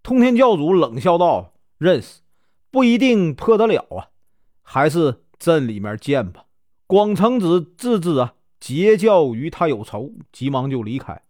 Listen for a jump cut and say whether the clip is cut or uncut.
cut